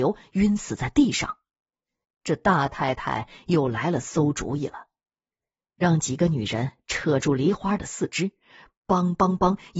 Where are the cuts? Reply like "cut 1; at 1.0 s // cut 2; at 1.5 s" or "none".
cut 1; at 2.0 s